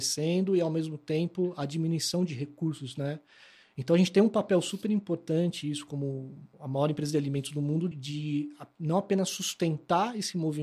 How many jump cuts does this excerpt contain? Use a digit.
2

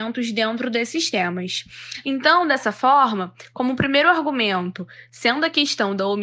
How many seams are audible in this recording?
1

